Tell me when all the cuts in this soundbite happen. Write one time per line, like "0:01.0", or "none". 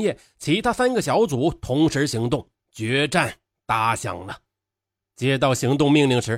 0:05.0